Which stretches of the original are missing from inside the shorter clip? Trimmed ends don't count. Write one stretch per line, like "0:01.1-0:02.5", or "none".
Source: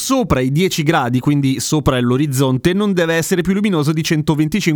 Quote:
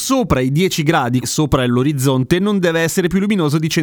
0:01.2-0:01.6